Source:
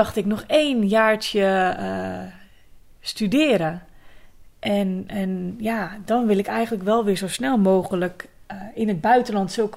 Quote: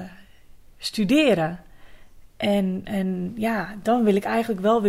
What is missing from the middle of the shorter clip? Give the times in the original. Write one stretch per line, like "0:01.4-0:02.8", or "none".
none